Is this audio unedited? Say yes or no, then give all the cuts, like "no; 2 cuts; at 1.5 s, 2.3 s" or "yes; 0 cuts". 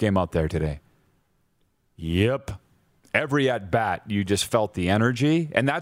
yes; 0 cuts